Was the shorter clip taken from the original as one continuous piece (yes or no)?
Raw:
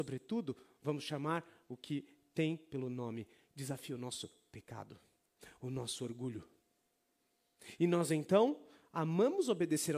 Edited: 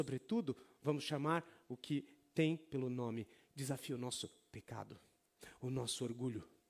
yes